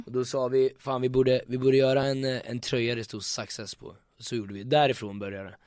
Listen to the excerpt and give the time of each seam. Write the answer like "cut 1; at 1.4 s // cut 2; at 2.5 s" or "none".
none